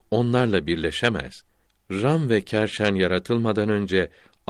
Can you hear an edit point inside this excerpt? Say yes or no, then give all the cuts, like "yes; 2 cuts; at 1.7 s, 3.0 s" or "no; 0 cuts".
no; 0 cuts